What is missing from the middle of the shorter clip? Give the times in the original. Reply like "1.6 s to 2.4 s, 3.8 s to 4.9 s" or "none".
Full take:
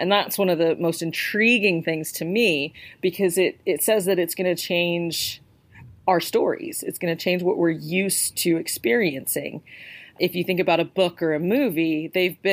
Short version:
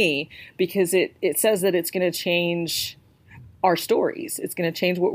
none